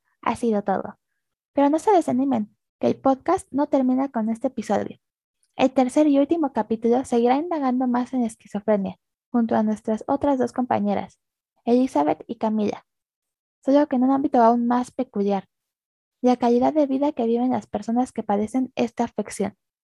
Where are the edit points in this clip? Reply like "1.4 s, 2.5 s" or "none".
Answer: none